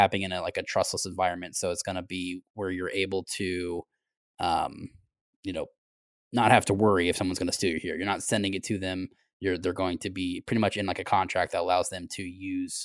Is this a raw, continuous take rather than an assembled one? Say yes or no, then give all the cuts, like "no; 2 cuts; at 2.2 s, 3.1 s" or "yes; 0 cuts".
yes; 0 cuts